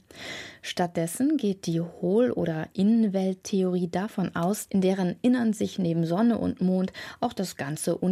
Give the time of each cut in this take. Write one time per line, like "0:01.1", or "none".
0:04.7